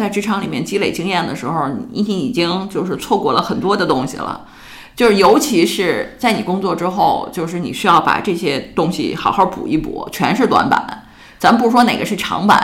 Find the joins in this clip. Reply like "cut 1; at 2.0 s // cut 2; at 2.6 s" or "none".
none